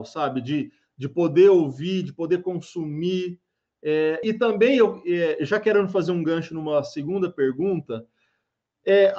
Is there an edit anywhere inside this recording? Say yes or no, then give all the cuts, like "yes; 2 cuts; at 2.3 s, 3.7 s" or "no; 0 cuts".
yes; 1 cut; at 4.2 s